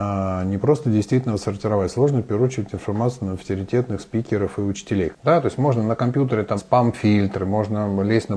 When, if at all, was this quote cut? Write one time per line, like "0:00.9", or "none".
0:05.1
0:06.6